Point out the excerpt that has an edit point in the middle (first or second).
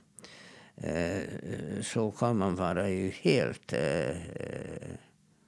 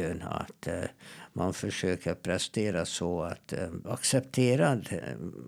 second